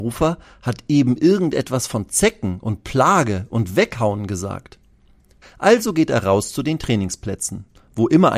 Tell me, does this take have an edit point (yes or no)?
yes